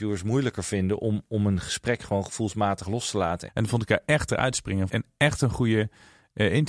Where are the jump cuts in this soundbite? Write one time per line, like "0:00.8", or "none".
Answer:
0:03.5
0:04.9